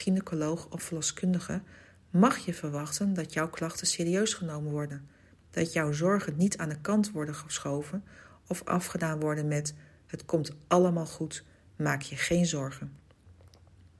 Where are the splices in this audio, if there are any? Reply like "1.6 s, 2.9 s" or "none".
none